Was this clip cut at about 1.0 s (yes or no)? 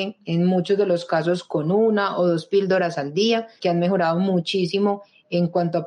no